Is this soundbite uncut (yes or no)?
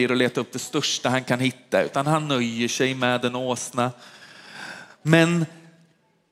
yes